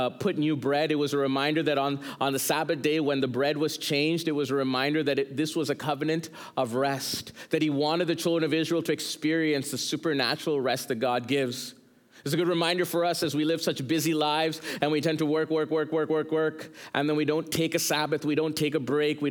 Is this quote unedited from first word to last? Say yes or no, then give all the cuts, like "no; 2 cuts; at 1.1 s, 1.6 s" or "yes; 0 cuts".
yes; 0 cuts